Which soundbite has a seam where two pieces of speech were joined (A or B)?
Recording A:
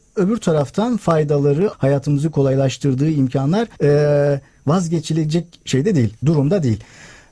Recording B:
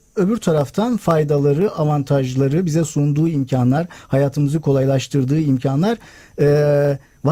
A